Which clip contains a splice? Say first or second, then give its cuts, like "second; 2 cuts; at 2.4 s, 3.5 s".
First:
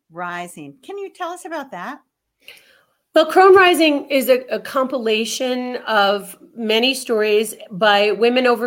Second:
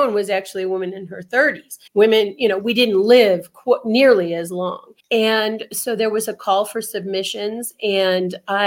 second; 2 cuts; at 1.9 s, 5.0 s